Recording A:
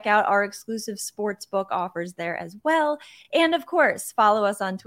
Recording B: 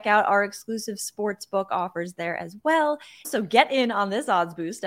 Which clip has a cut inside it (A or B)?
B